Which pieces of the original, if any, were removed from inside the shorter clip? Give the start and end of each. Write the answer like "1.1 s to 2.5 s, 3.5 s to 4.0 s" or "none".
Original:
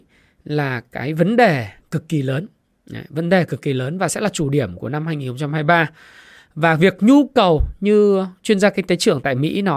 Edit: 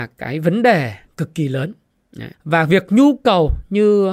3.1 s to 6.4 s